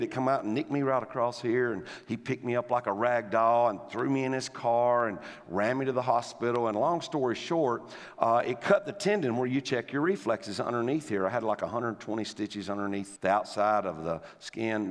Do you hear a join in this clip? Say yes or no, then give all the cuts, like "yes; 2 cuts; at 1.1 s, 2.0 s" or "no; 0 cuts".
yes; 1 cut; at 13.2 s